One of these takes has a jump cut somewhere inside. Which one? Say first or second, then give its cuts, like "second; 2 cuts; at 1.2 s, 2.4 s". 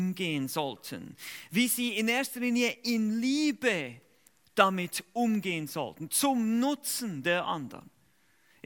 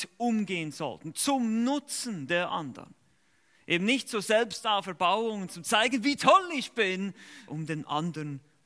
second; 2 cuts; at 5.5 s, 7.5 s